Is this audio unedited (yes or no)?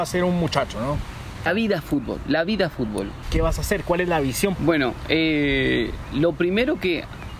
no